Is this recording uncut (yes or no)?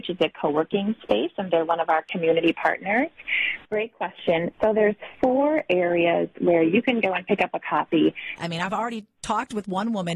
no